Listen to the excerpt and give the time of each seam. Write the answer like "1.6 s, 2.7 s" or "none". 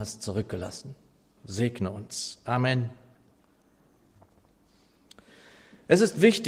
1.4 s